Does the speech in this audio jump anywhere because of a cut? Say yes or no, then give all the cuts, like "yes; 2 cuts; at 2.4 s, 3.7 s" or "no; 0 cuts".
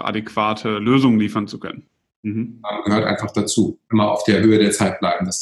yes; 1 cut; at 2.1 s